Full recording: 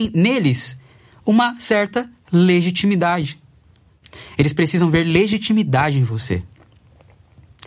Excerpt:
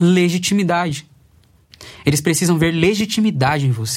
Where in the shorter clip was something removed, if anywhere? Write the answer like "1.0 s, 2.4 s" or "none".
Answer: none